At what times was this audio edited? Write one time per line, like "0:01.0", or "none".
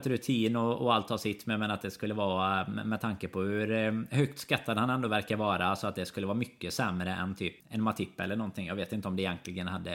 0:07.6